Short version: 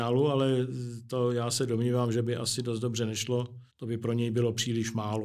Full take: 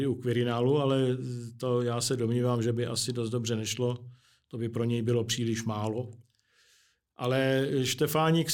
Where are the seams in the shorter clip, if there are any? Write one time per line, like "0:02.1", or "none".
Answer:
0:03.7